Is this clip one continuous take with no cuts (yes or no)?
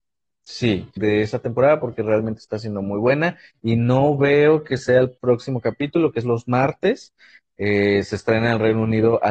no